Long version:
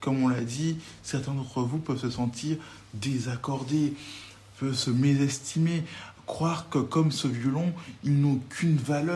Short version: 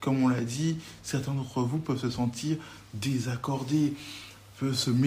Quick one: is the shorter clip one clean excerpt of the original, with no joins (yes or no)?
yes